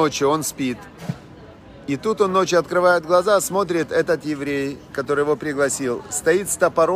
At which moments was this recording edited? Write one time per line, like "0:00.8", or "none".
none